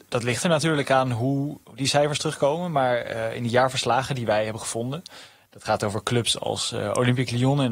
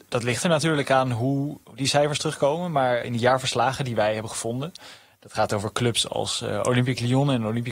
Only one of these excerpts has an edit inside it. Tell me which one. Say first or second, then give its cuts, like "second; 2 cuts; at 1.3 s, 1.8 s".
second; 1 cut; at 3.0 s